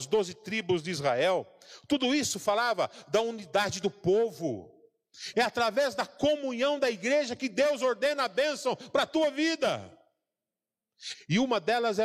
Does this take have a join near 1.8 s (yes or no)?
no